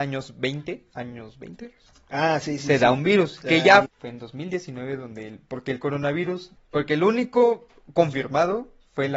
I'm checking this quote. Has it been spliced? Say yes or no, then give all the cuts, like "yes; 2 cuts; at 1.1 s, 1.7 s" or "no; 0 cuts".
yes; 2 cuts; at 3.8 s, 6.6 s